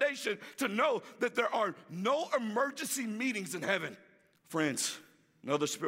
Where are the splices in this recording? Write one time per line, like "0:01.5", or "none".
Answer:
0:04.3